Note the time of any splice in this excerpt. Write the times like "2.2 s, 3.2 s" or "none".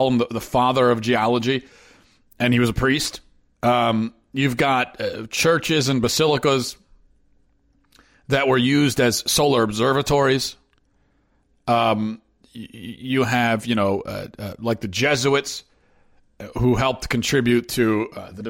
3.5 s